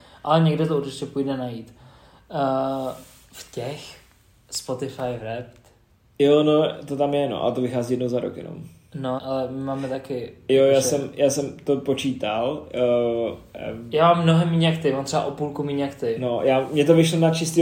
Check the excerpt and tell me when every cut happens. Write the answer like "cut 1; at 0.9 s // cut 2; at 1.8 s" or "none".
cut 1; at 9.2 s